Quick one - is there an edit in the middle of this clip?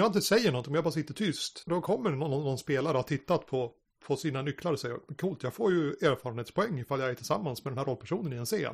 yes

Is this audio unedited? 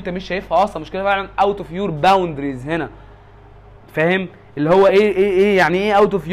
yes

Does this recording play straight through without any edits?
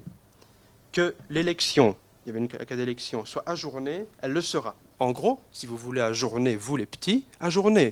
no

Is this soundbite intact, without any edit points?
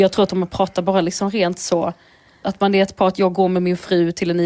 no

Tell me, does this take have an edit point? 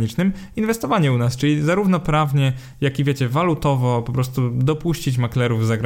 no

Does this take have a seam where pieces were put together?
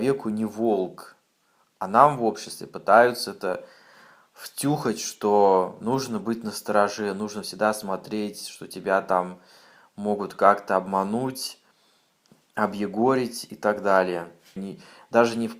yes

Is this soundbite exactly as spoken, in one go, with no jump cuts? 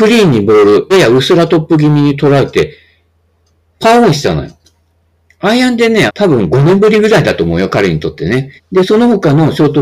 no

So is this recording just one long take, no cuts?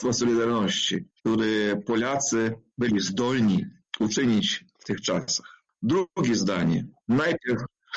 no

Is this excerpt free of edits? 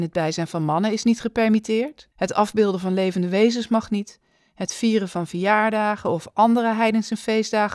no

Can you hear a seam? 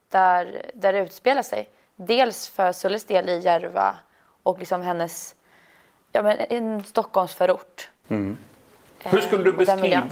no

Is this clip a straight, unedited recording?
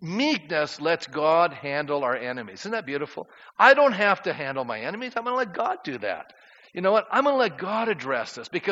yes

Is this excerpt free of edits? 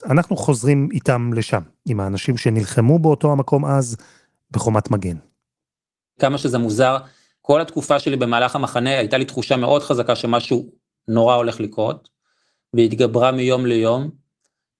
yes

